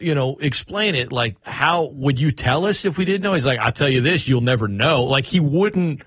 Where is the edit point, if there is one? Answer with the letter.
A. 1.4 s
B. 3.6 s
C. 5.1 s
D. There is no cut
A